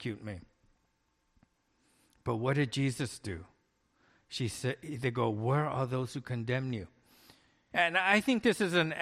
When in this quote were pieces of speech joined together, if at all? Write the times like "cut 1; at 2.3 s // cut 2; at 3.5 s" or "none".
cut 1; at 7.7 s